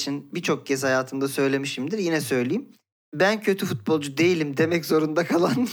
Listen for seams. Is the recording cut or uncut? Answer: uncut